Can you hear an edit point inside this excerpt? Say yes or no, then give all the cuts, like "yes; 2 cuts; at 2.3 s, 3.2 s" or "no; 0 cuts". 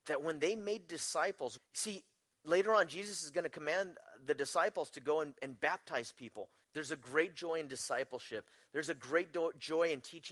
yes; 2 cuts; at 1.6 s, 6.6 s